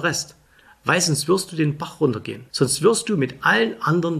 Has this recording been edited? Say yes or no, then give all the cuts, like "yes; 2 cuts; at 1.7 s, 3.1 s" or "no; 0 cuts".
yes; 1 cut; at 2.5 s